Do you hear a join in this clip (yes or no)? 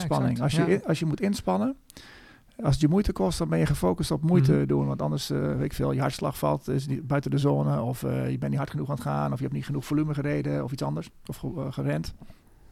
no